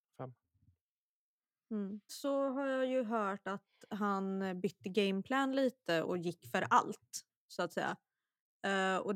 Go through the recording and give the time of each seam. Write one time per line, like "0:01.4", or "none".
0:02.1
0:06.0